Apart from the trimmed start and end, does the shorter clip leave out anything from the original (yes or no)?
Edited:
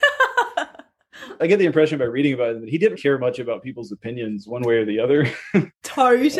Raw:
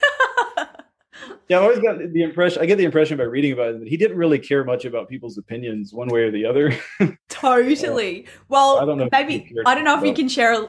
yes